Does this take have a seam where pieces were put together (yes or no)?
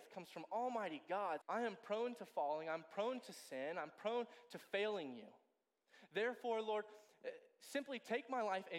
yes